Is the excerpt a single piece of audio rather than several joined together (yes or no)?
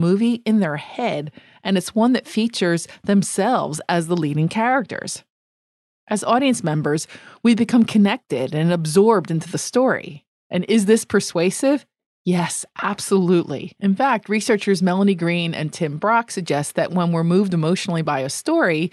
no